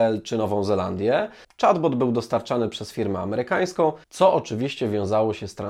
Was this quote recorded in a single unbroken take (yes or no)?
no